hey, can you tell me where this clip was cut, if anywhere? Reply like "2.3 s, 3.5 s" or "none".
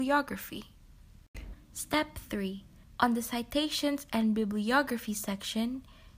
1.5 s, 2.8 s